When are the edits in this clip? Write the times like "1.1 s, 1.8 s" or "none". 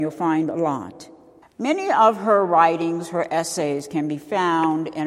1.4 s

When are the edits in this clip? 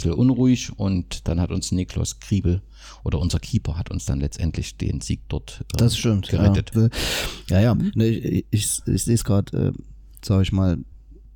6.7 s, 10.2 s

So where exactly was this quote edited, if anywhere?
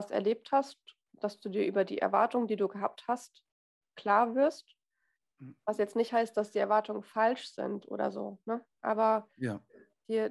none

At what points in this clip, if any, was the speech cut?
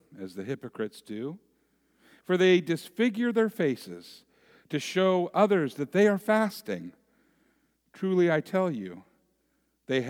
none

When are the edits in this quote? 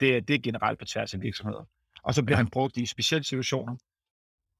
none

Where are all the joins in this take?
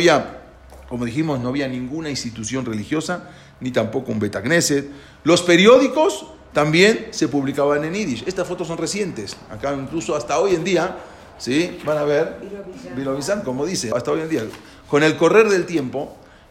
13.9 s

